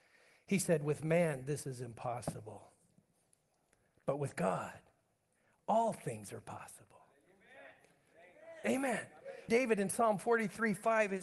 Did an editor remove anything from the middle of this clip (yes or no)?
yes